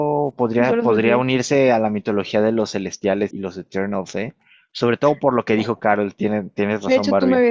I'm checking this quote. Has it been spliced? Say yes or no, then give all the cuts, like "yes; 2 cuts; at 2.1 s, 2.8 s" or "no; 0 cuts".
yes; 1 cut; at 3.3 s